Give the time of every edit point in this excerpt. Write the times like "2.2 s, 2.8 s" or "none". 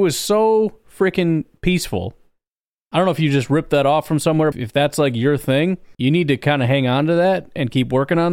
4.5 s, 5.9 s